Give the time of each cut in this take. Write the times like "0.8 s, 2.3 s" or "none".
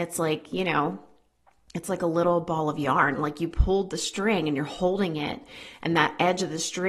none